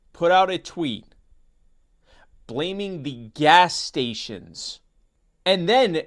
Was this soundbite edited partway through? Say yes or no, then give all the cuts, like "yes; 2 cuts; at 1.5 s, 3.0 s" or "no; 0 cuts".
no; 0 cuts